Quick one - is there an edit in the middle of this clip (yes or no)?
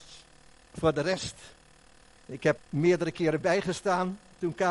yes